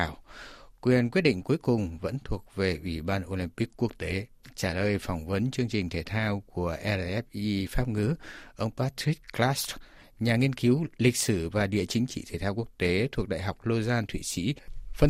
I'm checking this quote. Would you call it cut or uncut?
uncut